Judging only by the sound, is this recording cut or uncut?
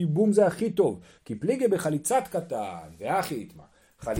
cut